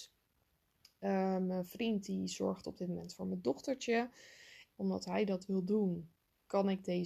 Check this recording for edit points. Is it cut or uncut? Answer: cut